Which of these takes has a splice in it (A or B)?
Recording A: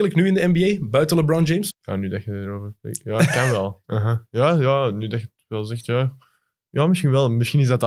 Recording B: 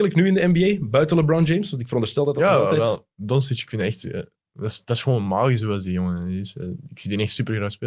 A